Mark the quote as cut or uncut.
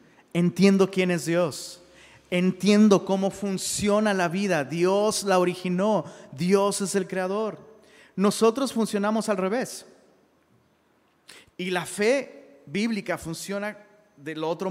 cut